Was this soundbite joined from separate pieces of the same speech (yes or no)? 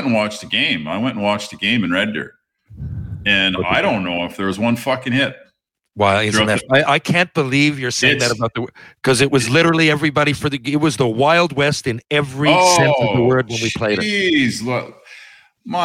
no